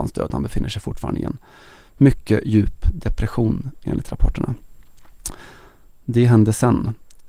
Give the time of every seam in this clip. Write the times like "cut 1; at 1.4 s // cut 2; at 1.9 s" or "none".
none